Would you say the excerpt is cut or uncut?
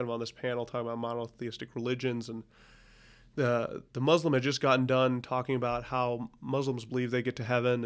uncut